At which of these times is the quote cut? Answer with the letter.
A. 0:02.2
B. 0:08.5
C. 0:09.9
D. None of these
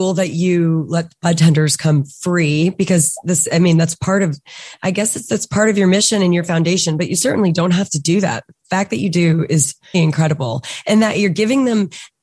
C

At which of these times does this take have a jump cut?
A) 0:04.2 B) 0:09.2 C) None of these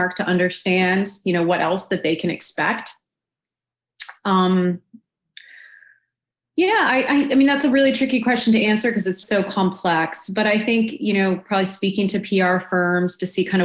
B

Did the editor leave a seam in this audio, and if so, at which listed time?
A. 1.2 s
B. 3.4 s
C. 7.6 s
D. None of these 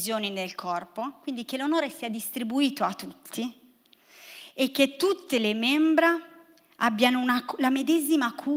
D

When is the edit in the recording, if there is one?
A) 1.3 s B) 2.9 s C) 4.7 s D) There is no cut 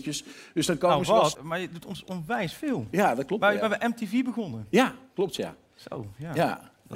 A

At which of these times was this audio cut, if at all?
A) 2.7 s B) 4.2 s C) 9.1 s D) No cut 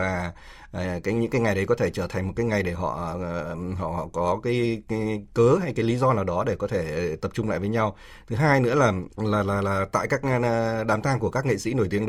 C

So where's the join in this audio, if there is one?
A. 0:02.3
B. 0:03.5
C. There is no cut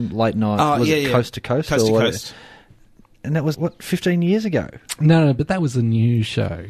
B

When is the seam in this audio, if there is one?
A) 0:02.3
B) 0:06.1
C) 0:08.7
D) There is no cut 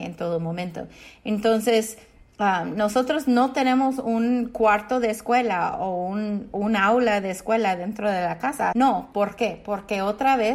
C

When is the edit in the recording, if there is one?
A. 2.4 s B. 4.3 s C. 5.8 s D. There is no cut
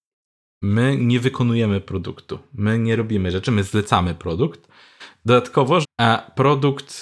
C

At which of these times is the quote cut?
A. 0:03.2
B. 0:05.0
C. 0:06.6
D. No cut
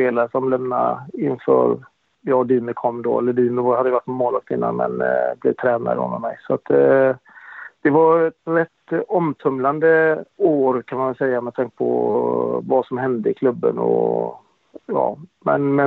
D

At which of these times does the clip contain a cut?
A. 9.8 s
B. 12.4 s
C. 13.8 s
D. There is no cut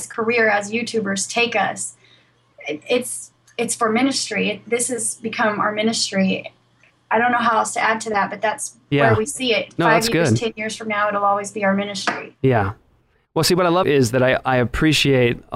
C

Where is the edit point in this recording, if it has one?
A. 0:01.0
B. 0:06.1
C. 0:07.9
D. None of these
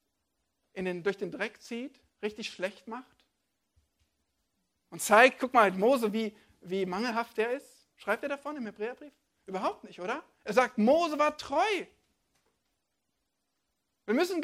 C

